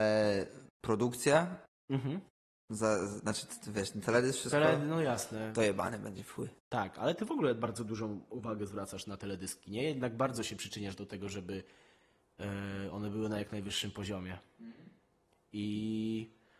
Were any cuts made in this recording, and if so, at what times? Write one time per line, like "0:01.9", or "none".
none